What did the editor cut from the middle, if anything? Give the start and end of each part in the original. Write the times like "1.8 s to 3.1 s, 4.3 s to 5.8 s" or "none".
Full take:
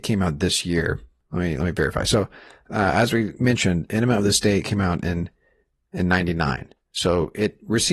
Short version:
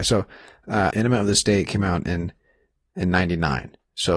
2.9 s to 3.9 s